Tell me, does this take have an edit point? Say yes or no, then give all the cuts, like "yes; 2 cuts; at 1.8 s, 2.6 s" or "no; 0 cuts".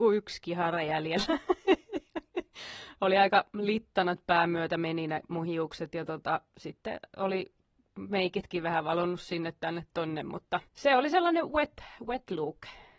yes; 1 cut; at 10.7 s